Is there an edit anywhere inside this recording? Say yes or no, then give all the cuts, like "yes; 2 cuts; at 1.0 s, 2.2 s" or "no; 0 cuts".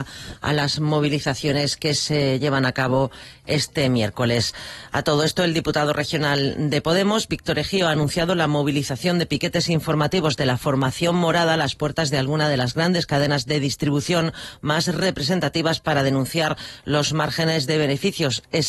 no; 0 cuts